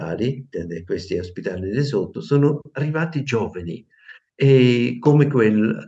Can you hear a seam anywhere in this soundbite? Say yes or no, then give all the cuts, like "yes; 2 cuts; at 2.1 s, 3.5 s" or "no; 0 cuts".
no; 0 cuts